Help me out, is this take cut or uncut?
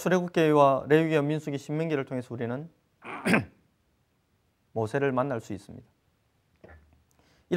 uncut